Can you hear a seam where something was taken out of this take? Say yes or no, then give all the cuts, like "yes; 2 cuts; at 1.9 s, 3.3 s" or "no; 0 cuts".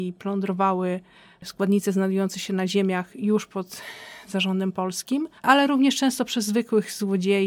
yes; 1 cut; at 5.4 s